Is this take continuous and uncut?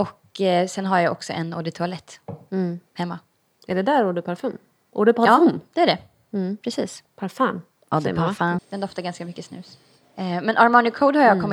no; 1 cut; at 8.6 s

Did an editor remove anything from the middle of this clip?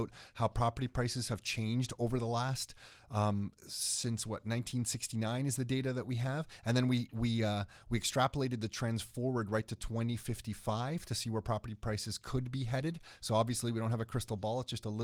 no; 0 cuts

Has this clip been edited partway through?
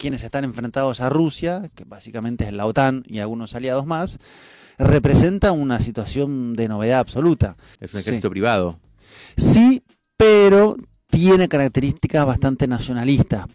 yes; 2 cuts; at 1.7 s, 7.8 s

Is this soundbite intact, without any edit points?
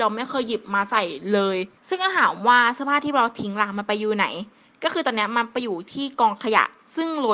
no; 1 cut; at 1.8 s

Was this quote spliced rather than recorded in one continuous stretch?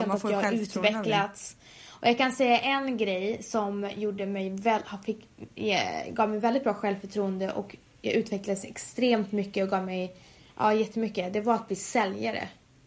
no; 0 cuts

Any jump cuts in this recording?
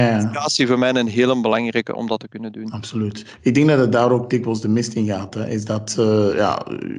no; 0 cuts

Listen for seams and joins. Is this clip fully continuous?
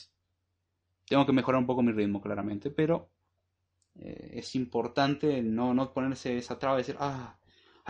yes; 0 cuts

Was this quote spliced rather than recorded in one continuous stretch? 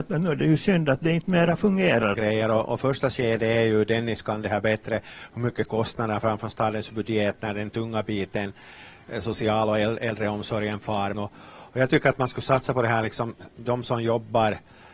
yes; 2 cuts; at 2.1 s, 11.1 s

